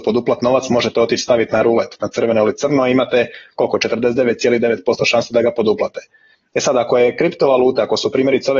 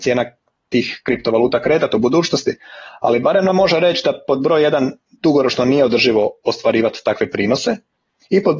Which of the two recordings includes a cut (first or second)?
first